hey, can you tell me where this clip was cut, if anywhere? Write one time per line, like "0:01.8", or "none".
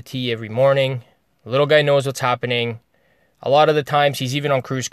none